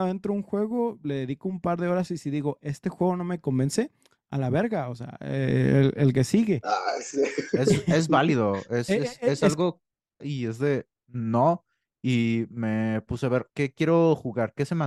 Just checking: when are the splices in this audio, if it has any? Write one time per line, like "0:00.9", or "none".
0:10.2
0:13.5